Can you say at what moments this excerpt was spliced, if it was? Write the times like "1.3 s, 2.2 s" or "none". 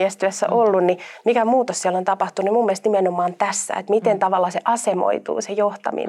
none